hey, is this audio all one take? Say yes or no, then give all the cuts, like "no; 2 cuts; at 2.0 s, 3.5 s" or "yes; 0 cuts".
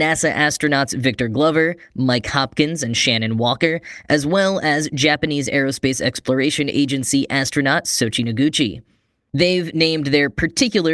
yes; 0 cuts